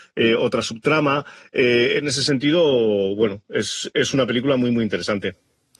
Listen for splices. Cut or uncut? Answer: uncut